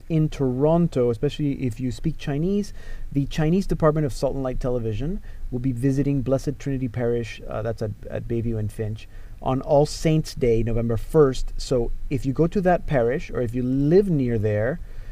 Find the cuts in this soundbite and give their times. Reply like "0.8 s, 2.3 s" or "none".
none